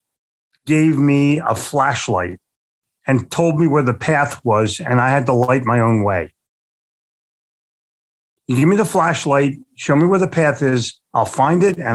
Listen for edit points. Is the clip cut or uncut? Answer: uncut